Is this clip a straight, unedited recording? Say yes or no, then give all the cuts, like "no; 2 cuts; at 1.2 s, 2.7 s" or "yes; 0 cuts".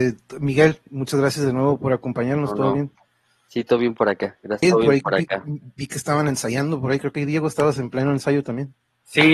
no; 1 cut; at 4.6 s